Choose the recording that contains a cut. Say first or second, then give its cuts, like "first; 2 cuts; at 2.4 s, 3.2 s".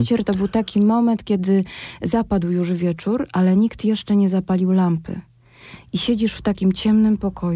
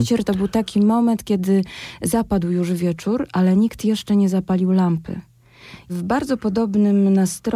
second; 1 cut; at 5.9 s